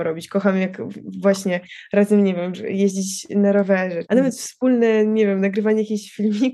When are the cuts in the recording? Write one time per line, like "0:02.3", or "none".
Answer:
0:02.5
0:04.1